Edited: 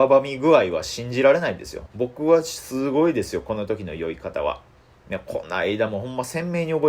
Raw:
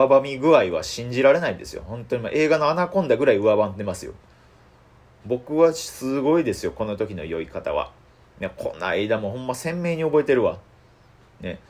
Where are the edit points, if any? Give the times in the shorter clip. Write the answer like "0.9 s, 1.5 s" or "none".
1.9 s